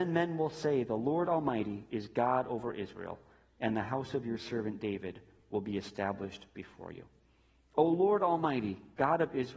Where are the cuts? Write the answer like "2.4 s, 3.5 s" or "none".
none